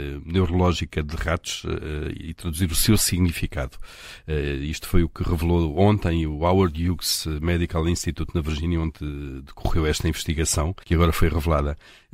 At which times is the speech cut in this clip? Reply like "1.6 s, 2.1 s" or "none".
10.8 s